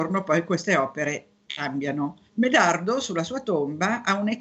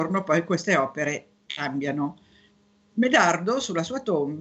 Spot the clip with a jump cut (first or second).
first